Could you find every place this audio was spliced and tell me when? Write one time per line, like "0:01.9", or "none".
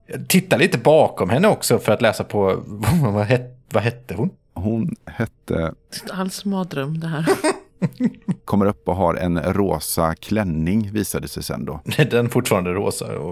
0:08.5